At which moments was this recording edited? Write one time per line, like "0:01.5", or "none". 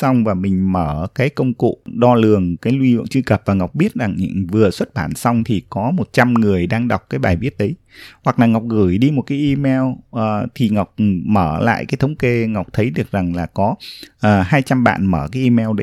0:01.8